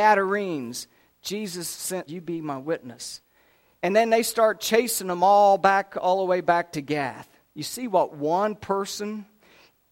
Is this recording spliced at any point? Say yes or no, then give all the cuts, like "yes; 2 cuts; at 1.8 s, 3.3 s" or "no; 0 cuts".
yes; 2 cuts; at 2.1 s, 3.8 s